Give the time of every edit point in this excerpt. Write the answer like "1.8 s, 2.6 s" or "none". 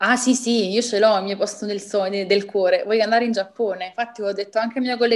none